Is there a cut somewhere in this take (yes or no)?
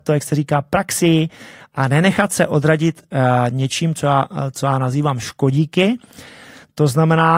no